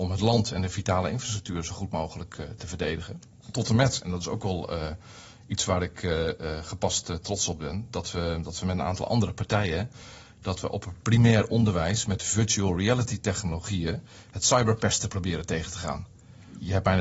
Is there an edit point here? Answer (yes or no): no